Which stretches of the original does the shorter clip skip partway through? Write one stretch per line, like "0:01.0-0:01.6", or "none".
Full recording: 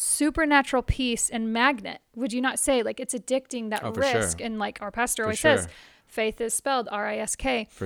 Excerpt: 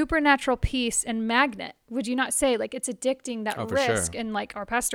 none